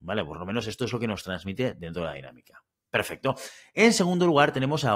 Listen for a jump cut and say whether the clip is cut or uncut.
uncut